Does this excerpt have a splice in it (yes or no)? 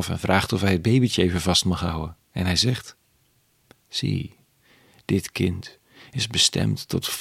no